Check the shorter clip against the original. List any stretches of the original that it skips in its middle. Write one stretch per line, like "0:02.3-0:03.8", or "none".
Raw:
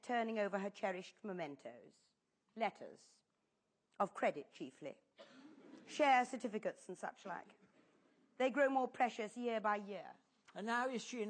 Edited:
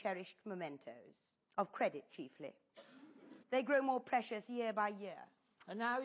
0:02.2-0:03.8
0:05.8-0:08.3